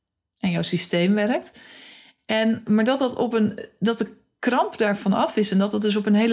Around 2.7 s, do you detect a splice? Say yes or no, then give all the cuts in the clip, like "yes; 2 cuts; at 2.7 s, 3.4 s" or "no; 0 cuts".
yes; 1 cut; at 2.7 s